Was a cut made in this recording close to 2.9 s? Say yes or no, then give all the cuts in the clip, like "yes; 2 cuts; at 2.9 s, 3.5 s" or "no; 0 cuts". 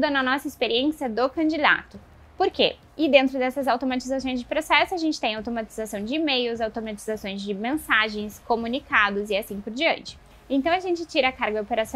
yes; 1 cut; at 2.9 s